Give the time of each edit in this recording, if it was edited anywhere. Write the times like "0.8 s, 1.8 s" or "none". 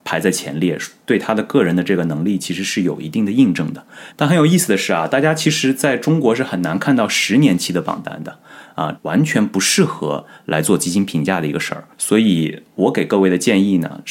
4.1 s, 9.0 s, 11.9 s